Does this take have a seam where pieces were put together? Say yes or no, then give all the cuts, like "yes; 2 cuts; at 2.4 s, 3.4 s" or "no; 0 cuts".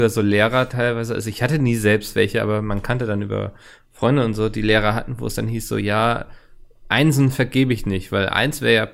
no; 0 cuts